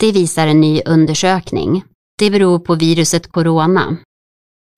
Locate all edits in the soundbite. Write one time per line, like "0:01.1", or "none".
0:02.1